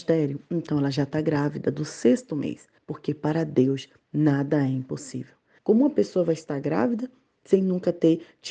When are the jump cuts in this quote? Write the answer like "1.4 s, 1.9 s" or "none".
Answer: 2.8 s, 5.6 s